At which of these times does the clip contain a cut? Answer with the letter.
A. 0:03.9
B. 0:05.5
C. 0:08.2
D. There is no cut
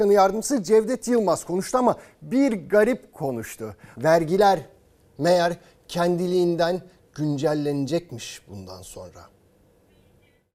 A